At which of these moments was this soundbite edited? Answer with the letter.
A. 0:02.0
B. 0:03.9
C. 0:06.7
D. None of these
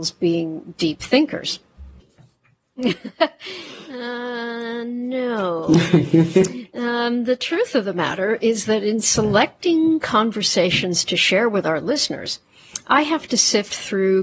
A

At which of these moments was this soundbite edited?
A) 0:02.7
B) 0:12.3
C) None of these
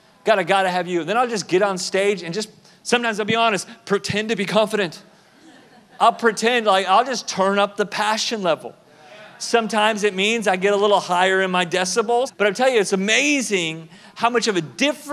B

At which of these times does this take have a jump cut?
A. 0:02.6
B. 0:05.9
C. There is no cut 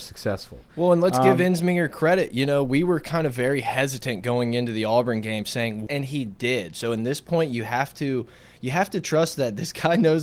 B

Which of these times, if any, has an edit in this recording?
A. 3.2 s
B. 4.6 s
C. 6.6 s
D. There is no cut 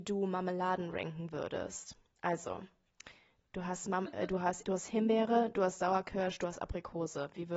B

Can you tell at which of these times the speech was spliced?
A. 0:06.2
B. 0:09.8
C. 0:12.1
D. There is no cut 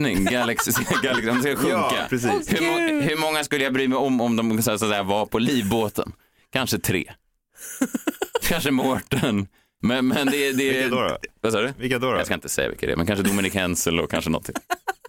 B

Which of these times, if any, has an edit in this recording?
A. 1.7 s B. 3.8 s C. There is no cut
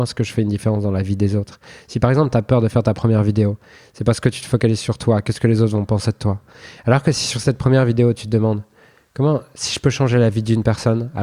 C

